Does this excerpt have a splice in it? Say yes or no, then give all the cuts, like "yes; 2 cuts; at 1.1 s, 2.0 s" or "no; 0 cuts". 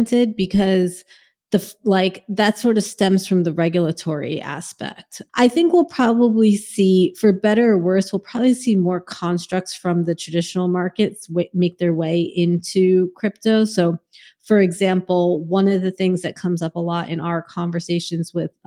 yes; 1 cut; at 5.3 s